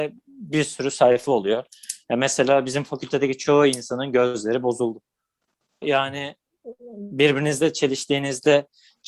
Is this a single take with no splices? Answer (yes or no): no